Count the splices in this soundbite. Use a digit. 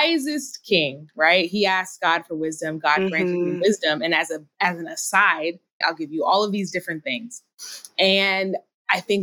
1